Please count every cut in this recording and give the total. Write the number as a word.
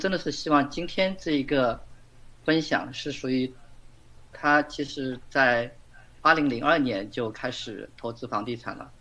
one